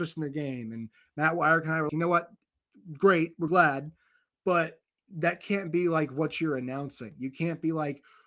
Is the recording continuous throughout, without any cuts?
no; 1 cut; at 1.9 s

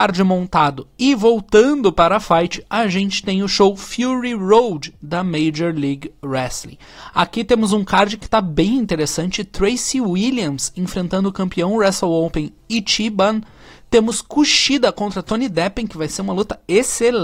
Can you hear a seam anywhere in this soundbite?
no; 0 cuts

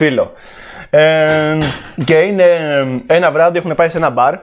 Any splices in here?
yes; 1 cut; at 2.0 s

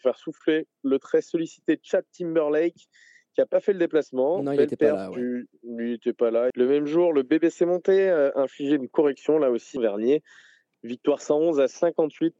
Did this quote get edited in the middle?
yes; 2 cuts; at 6.5 s, 9.8 s

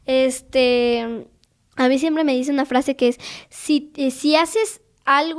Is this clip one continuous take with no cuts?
yes; 0 cuts

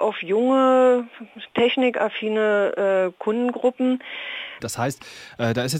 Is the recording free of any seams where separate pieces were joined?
no; 1 cut; at 4.6 s

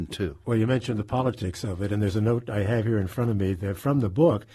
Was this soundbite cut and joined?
no; 0 cuts

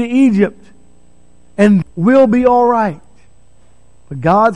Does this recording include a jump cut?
yes; 1 cut; at 1.8 s

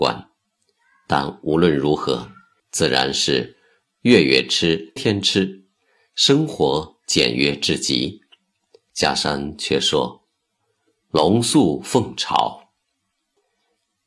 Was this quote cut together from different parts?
yes; 3 cuts; at 2.6 s, 5.0 s, 8.9 s

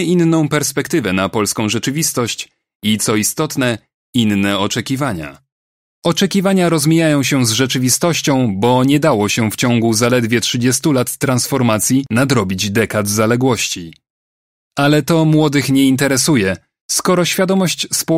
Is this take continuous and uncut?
no; 1 cut; at 5.9 s

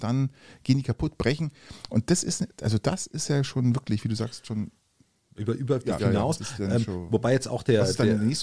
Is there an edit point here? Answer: yes; 1 cut; at 6.0 s

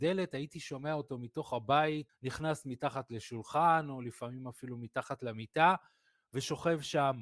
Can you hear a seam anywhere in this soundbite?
yes; 1 cut; at 2.1 s

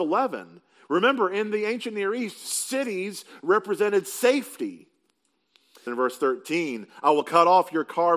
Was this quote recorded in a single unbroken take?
no; 1 cut; at 5.9 s

